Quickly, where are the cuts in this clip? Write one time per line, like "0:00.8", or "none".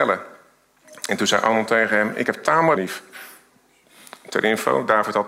0:02.8